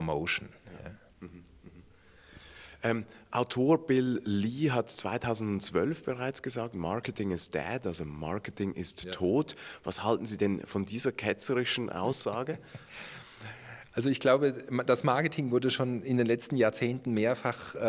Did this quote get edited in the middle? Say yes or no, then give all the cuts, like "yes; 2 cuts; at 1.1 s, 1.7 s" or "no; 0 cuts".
no; 0 cuts